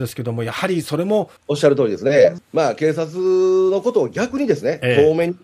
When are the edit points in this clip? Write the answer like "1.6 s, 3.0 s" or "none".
1.4 s, 2.4 s